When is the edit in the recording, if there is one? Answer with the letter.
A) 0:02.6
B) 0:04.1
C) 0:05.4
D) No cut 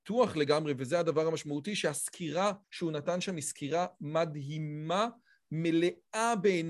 A